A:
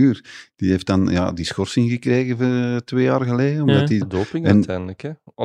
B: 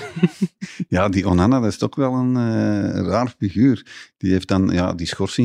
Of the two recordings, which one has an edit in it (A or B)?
A